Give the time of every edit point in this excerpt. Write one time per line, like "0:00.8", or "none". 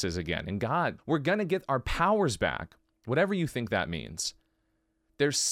0:01.0

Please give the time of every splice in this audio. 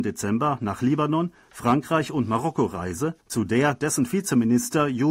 0:03.2

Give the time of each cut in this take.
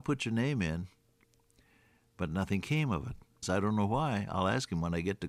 0:03.4

